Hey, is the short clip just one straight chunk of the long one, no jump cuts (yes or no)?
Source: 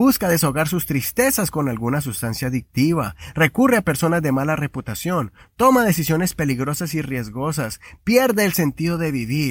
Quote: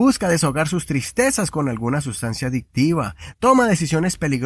no